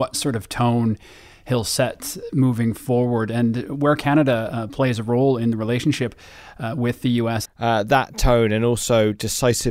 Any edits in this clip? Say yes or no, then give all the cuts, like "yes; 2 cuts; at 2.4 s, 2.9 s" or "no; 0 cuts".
yes; 1 cut; at 7.4 s